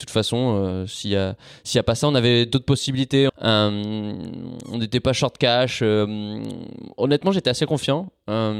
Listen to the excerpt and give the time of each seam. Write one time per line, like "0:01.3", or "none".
0:03.3